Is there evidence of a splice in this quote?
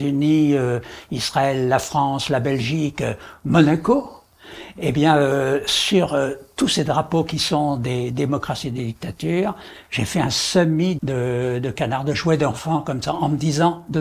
yes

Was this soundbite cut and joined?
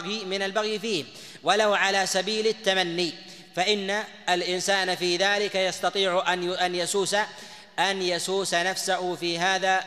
no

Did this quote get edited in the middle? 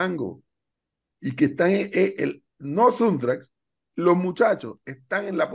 no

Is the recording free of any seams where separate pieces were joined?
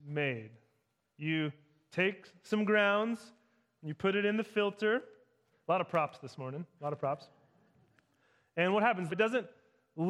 no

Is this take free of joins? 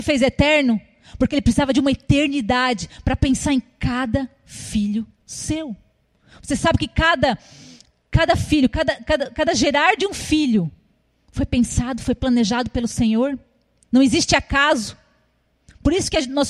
yes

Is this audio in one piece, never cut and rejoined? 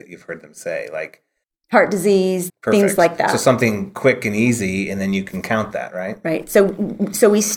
no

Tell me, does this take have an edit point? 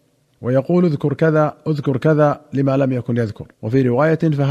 yes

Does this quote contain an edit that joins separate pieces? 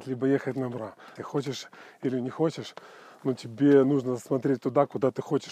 yes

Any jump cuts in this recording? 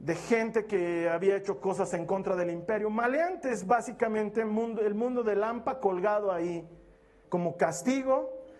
yes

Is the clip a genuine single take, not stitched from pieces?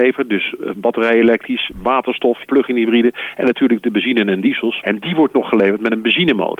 no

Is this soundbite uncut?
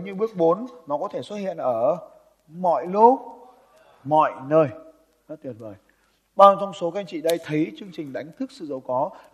yes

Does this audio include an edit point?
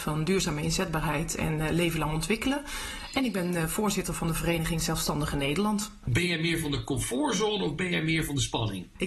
no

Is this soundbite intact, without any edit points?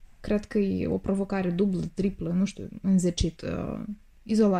no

